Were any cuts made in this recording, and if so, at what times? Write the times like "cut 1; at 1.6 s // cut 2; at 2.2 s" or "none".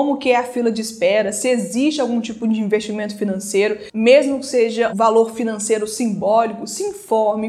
cut 1; at 4.9 s